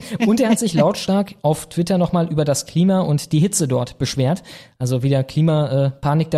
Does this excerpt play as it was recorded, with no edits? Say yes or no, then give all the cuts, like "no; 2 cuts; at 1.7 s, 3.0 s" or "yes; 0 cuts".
yes; 0 cuts